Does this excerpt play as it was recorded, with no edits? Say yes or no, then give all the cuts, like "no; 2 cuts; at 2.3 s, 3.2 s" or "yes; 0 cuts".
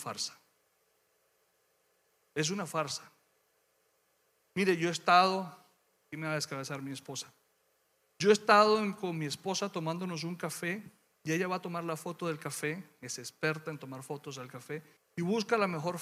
no; 1 cut; at 15.0 s